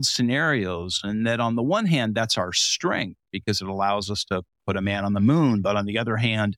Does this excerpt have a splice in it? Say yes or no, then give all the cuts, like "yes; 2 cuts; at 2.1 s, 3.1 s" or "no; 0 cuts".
no; 0 cuts